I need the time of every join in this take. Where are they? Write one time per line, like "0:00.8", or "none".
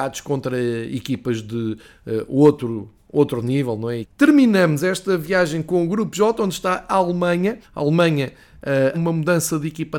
0:04.0
0:07.6
0:08.9

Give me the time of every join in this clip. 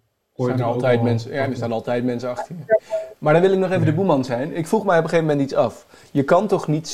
none

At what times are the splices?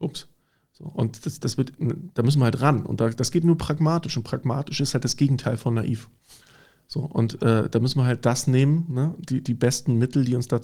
none

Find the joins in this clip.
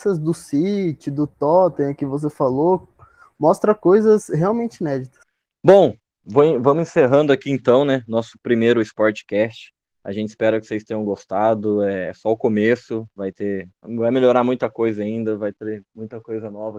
none

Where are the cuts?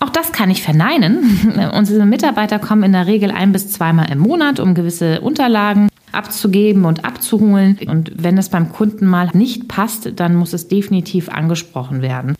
0:07.9
0:09.3

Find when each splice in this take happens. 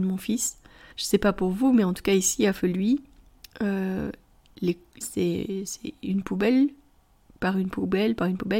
0:00.9
0:05.0

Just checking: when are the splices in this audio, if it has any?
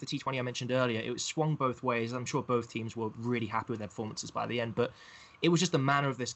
none

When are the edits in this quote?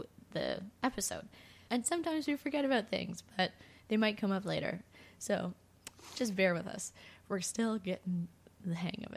0:01.7

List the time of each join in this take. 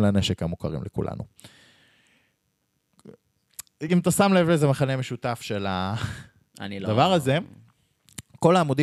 none

